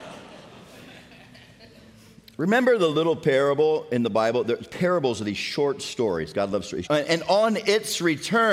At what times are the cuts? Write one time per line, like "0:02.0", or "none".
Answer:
0:06.8